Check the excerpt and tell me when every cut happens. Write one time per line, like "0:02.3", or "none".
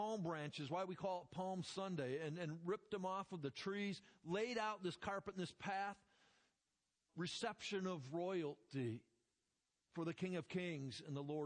0:07.1